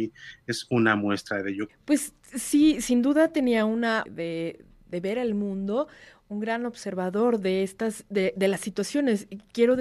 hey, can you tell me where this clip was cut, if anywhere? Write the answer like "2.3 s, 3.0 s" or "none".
1.7 s, 4.1 s